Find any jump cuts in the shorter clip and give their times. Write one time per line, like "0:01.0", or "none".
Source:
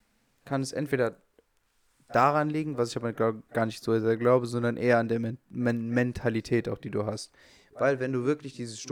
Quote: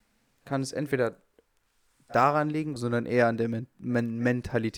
0:02.8